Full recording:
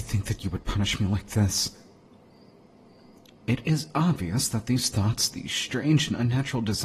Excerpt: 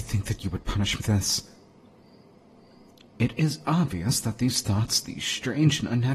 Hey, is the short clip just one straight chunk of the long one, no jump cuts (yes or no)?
no